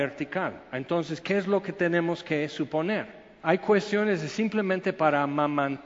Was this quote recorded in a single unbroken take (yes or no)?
no